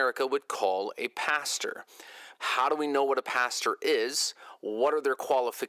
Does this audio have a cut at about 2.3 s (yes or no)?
yes